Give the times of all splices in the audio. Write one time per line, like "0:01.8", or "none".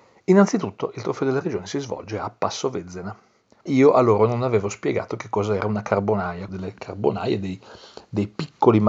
0:03.7
0:06.5